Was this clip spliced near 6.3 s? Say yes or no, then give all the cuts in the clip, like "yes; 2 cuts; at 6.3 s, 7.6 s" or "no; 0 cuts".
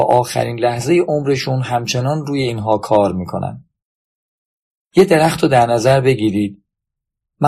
no; 1 cut; at 4.7 s